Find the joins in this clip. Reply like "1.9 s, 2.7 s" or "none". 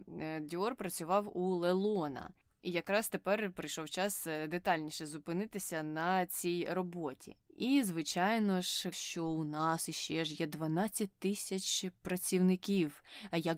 7.5 s, 8.9 s